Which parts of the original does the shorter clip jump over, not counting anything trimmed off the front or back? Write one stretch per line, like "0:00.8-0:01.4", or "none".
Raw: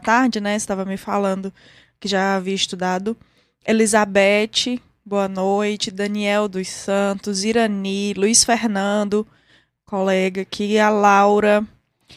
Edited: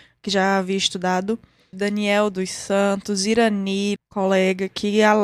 0:03.5-0:05.9
0:08.1-0:09.7